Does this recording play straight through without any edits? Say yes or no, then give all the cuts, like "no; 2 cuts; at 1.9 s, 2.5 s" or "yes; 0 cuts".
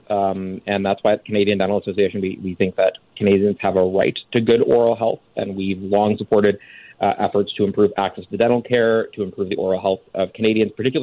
yes; 0 cuts